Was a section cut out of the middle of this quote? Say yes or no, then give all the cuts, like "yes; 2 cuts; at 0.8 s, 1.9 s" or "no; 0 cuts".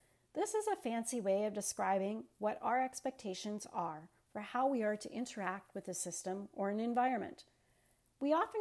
no; 0 cuts